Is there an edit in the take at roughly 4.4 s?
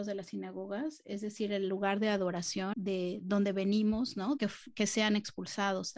yes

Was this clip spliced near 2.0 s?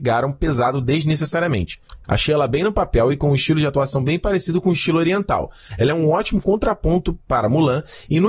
yes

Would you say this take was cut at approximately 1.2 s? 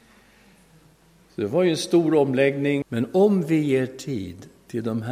no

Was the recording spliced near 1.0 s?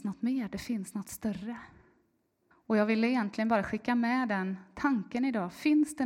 no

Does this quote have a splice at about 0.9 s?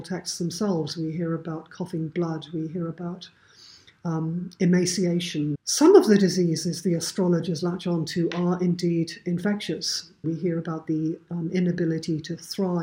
no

